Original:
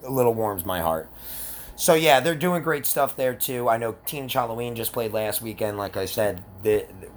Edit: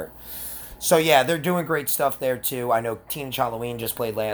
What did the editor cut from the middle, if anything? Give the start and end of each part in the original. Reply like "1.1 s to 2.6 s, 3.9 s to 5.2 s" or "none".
none